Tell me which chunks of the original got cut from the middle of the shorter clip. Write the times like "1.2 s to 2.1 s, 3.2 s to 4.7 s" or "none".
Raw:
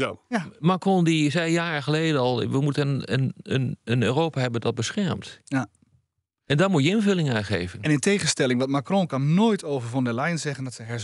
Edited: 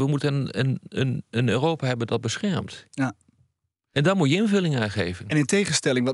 none